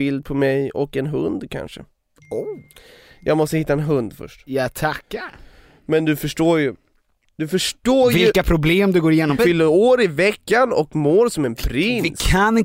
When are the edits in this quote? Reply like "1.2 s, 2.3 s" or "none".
9.4 s